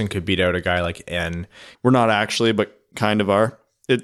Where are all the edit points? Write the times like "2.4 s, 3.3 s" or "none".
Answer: 1.7 s